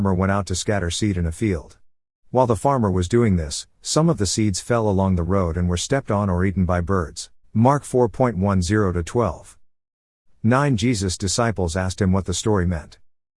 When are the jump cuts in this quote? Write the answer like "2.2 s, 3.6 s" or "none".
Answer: 7.4 s